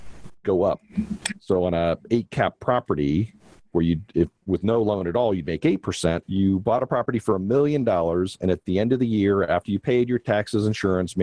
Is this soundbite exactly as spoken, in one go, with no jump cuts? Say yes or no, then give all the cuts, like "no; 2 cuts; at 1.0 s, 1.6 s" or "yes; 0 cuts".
no; 1 cut; at 6.2 s